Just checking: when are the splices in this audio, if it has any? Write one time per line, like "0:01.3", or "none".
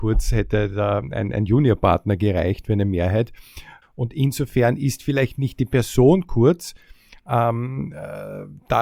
0:03.8